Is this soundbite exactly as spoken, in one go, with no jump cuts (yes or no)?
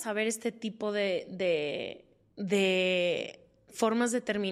yes